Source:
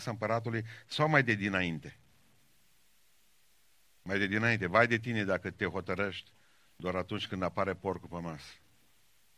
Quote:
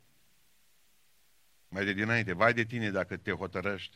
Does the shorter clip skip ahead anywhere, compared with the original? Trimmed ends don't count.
no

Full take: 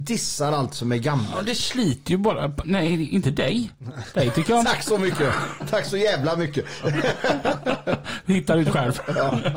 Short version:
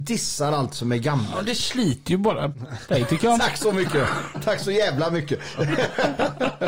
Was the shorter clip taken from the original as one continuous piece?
no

